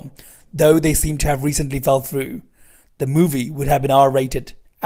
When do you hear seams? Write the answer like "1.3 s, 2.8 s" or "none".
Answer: none

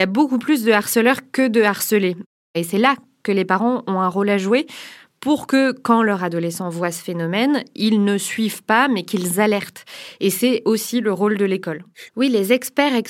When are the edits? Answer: 12.1 s

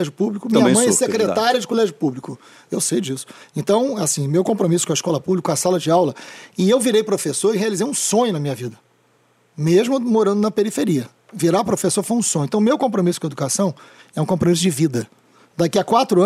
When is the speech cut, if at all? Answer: none

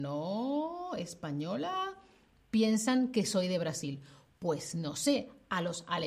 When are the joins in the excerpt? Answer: none

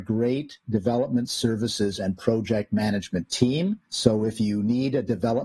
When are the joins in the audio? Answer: 3.9 s

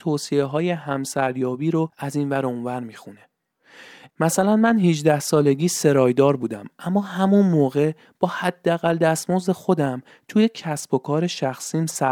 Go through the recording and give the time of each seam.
4.1 s

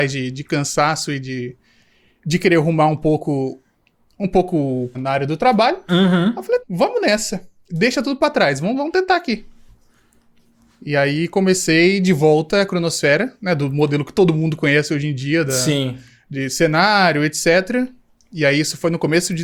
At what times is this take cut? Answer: 4.9 s, 6.6 s

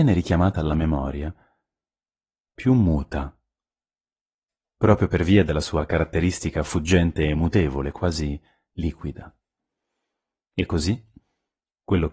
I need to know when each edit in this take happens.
none

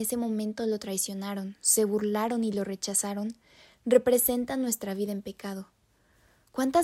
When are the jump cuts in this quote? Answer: none

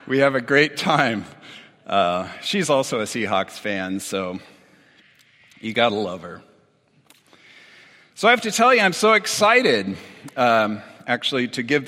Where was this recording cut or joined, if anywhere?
none

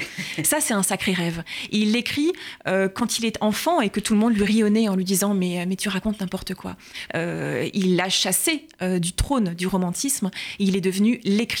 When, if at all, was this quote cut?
7.1 s

